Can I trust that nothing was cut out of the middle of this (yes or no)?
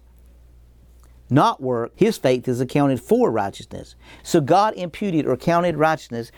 no